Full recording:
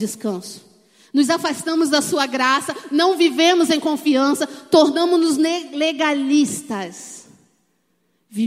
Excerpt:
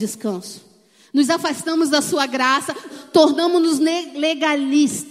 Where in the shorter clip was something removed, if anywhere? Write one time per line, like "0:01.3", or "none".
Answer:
0:02.9